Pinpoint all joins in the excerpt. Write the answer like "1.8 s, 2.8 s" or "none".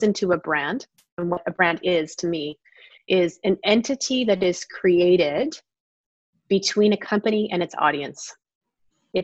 none